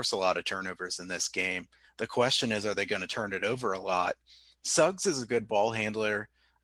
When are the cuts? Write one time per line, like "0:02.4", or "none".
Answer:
none